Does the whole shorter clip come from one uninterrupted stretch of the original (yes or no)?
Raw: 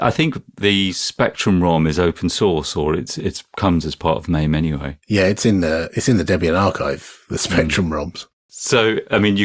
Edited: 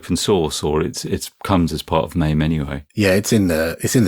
yes